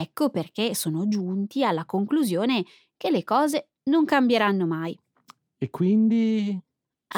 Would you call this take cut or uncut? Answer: uncut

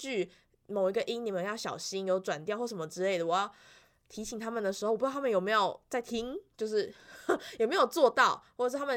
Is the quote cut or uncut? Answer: uncut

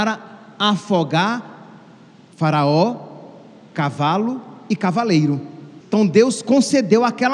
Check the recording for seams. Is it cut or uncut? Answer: cut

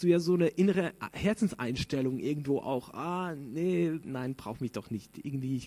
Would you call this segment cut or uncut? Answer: uncut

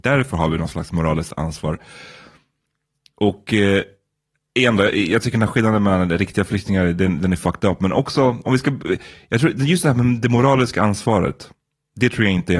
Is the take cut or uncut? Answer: uncut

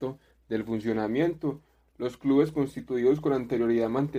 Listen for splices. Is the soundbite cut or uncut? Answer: uncut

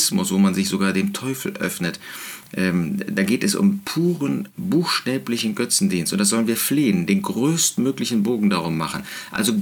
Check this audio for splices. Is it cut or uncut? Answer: uncut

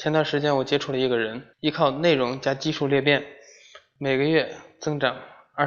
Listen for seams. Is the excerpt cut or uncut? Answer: cut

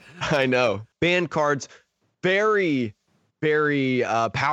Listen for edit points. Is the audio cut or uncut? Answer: cut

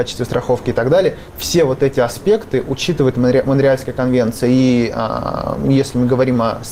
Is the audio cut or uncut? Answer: uncut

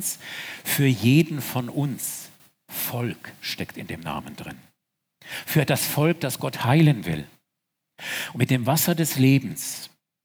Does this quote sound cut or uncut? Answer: cut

